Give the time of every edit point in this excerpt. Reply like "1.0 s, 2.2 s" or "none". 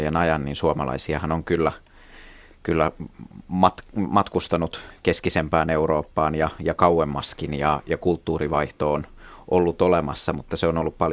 none